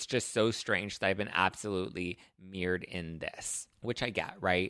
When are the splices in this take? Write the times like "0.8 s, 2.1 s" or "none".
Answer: 3.7 s